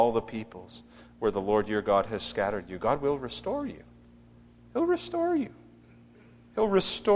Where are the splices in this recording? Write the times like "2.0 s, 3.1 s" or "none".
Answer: none